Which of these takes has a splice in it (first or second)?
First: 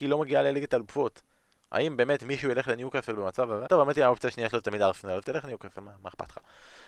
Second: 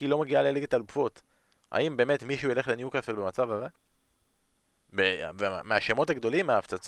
first